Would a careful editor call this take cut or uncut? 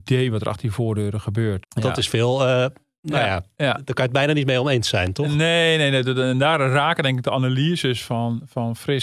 cut